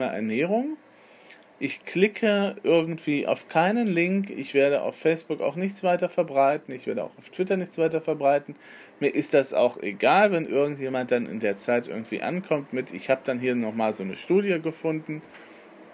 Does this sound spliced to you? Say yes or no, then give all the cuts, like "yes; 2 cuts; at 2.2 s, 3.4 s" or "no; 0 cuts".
no; 0 cuts